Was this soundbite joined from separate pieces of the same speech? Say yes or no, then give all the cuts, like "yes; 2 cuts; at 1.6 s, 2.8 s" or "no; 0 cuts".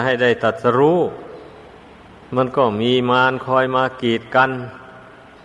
no; 0 cuts